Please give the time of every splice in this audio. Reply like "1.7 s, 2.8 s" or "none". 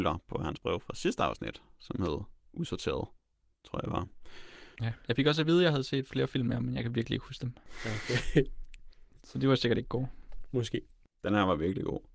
4.8 s